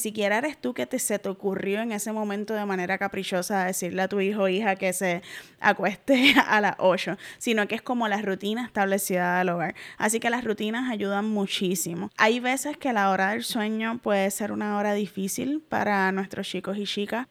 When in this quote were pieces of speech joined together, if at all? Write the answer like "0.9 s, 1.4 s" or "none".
none